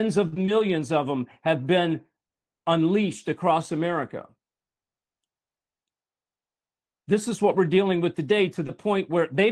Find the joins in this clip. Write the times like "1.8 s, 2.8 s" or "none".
none